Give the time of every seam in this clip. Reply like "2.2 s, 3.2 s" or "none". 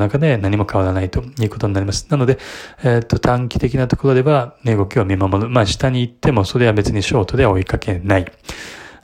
none